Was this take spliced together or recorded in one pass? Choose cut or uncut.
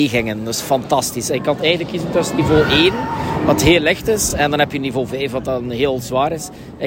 uncut